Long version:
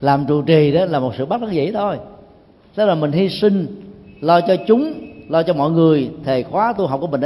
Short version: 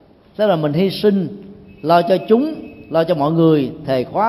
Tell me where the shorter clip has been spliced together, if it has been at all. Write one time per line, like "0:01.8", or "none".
none